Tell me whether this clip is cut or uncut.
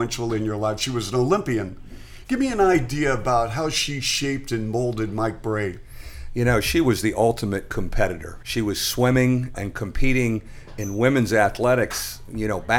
cut